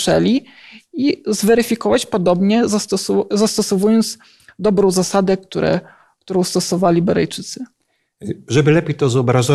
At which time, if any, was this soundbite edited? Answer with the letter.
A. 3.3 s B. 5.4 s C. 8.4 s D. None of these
D